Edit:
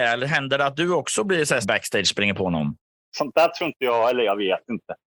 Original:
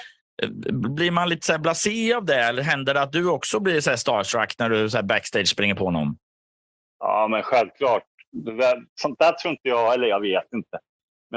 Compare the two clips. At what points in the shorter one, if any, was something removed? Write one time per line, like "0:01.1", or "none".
0:01.6
0:03.1